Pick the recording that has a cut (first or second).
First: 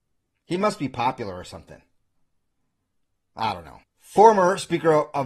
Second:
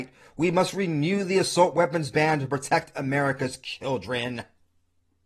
first